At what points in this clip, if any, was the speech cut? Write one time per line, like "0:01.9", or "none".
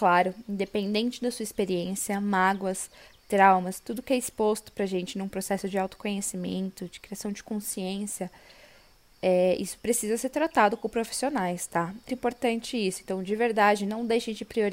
0:12.1